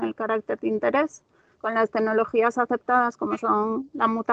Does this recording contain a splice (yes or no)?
yes